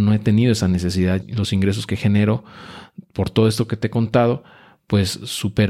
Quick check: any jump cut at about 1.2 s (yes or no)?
yes